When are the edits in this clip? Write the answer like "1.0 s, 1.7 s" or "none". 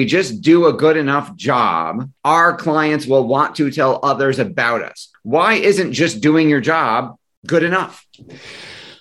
2.2 s, 5.1 s